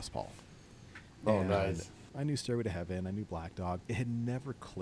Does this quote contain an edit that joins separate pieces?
yes; 2 cuts; at 2.1 s, 3.8 s

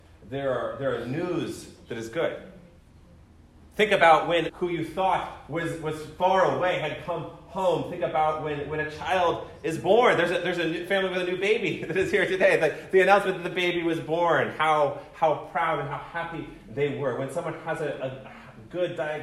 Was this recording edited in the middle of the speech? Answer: yes; 1 cut; at 4.5 s

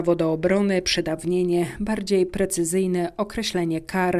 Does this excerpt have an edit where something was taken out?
no; 0 cuts

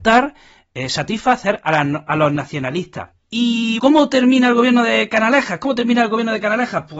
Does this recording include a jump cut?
yes; 1 cut; at 3.8 s

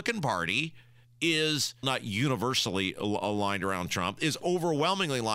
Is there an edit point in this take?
yes; 1 cut; at 1.8 s

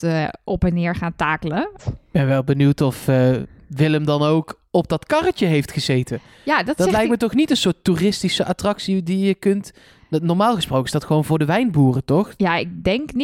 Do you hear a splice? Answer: yes; 1 cut; at 1.8 s

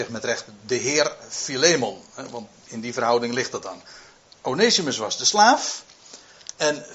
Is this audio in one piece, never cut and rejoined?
yes; 0 cuts

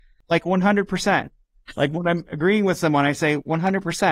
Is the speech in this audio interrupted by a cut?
no; 0 cuts

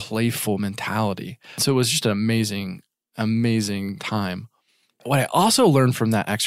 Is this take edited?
no; 0 cuts

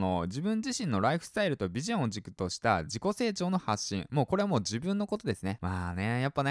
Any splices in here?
yes; 1 cut; at 5.6 s

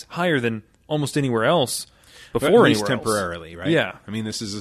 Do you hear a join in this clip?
no; 0 cuts

